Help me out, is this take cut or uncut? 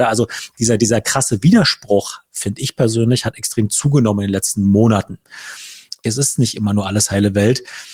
cut